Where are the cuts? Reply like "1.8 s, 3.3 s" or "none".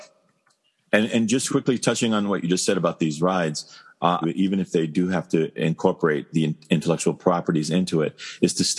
1.5 s, 4.2 s